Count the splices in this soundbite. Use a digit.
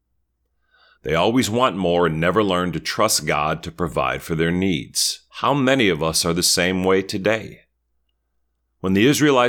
2